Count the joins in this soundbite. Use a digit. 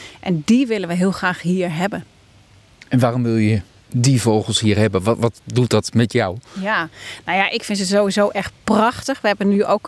0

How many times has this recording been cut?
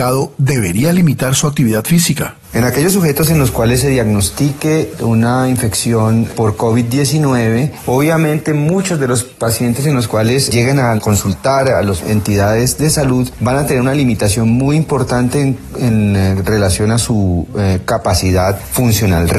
1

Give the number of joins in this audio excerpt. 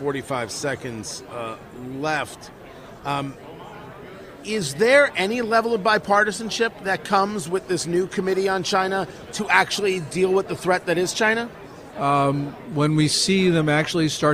1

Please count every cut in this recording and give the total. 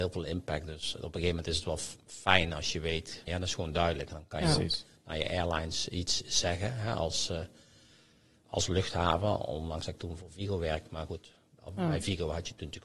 1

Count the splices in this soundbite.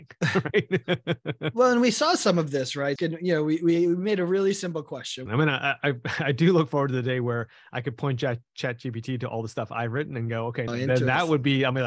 3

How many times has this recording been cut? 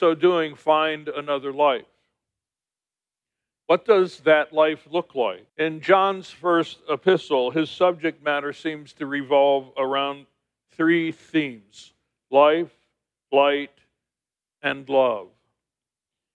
1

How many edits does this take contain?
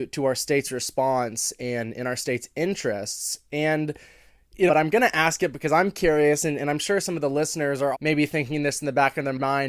2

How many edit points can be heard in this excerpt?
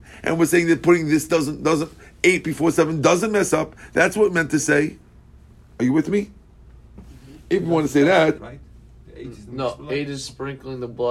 1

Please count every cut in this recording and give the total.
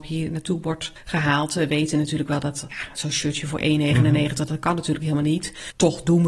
0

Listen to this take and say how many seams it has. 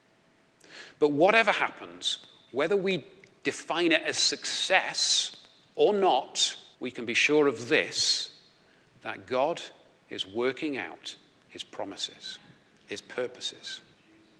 1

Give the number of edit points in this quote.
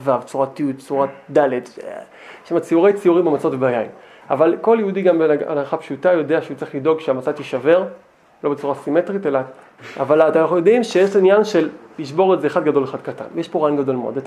1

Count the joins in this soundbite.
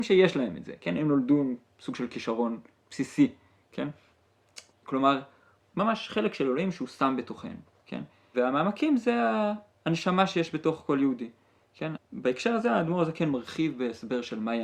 3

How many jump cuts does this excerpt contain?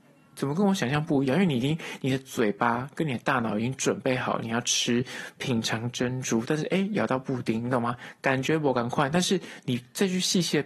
0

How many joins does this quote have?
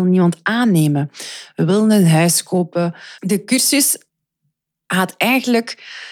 1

